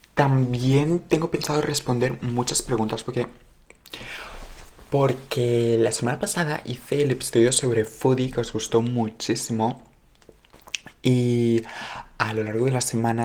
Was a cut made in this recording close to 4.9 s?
no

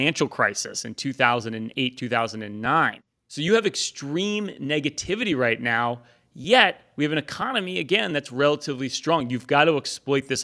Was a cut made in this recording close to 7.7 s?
no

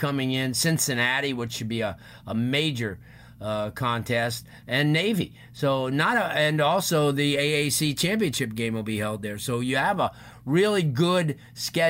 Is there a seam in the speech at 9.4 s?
no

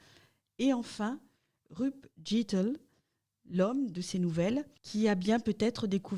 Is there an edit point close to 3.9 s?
yes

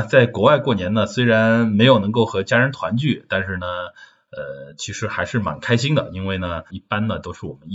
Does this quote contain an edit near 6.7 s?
yes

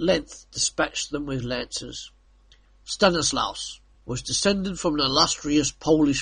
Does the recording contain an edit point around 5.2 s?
no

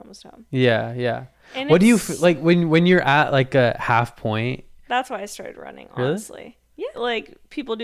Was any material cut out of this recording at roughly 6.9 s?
yes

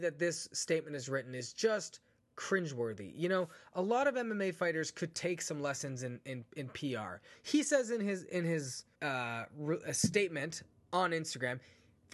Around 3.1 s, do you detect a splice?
no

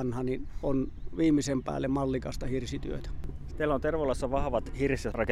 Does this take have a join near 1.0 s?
no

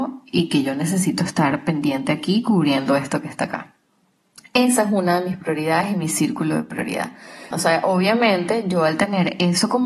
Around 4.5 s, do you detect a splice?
no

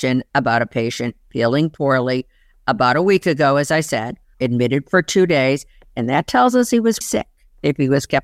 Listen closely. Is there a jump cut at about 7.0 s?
yes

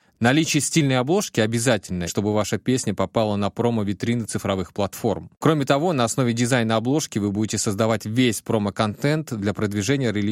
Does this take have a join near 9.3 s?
no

